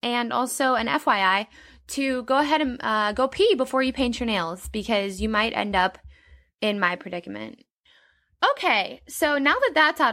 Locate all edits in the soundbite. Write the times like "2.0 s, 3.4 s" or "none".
none